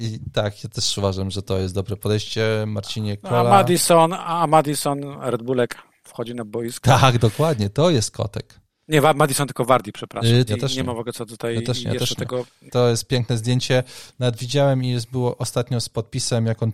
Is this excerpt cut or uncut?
cut